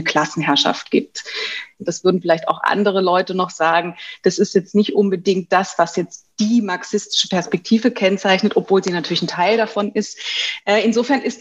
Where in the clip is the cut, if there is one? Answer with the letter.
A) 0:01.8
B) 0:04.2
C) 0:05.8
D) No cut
A